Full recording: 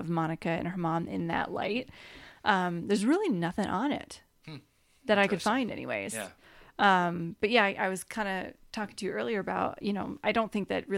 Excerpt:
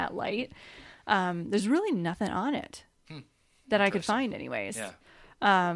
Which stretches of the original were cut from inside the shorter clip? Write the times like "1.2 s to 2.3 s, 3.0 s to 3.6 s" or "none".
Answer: none